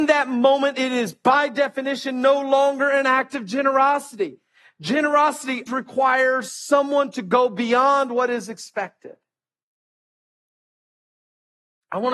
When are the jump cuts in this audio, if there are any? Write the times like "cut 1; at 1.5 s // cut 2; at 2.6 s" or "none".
cut 1; at 5.7 s